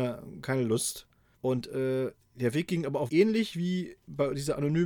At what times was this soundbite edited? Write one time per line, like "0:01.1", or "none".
0:01.4
0:03.1